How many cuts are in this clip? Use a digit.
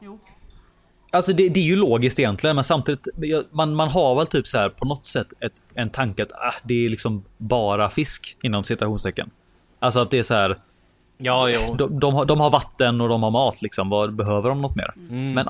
1